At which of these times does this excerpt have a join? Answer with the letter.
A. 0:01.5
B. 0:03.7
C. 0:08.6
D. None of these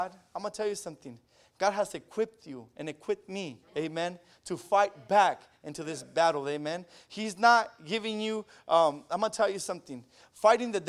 B